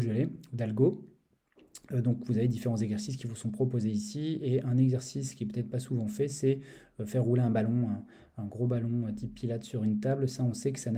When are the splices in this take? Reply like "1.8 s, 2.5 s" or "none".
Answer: none